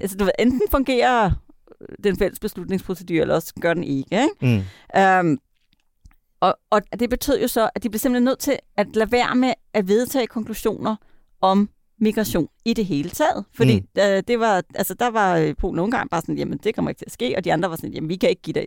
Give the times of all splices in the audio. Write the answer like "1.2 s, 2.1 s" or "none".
6.9 s